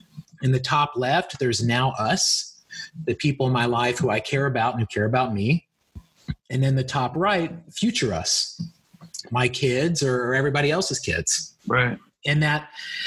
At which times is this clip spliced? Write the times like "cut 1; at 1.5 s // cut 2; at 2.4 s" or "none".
none